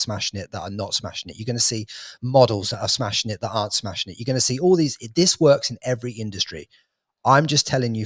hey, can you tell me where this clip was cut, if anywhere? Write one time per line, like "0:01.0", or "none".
none